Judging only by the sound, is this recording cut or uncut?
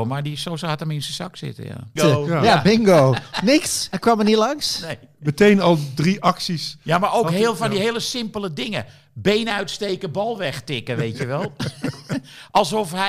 cut